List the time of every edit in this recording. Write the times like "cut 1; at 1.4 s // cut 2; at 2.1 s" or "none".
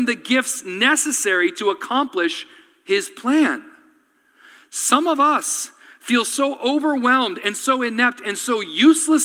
none